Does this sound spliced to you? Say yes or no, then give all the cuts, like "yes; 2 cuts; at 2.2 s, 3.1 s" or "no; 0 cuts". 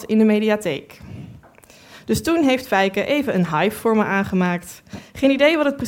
no; 0 cuts